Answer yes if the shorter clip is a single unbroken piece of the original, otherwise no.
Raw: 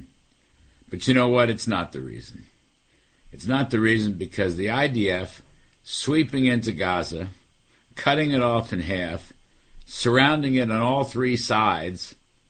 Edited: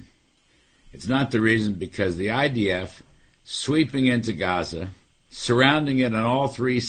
no